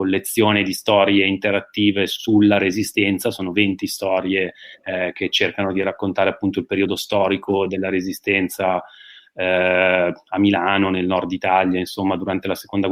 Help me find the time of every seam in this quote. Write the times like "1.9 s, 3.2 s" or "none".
none